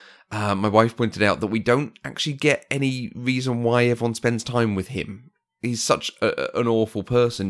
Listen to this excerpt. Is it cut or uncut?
uncut